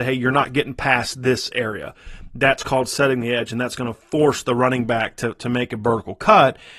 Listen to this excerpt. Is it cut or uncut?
uncut